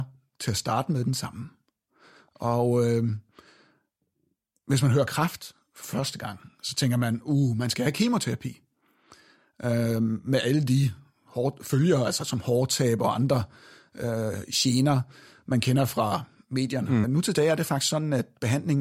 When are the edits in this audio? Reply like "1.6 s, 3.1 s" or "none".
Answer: 17.0 s